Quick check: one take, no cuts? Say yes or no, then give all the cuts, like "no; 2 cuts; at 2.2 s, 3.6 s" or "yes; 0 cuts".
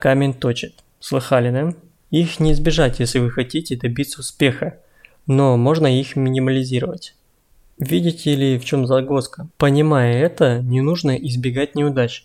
no; 2 cuts; at 2.0 s, 9.5 s